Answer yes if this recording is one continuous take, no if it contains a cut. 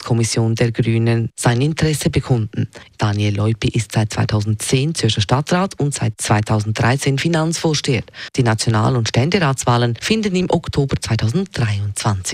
no